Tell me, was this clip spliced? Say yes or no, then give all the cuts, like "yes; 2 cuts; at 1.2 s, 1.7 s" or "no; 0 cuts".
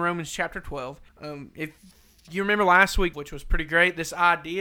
yes; 2 cuts; at 1.1 s, 3.1 s